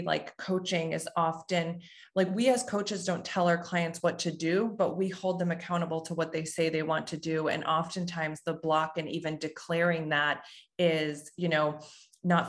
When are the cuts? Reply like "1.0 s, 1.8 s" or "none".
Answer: none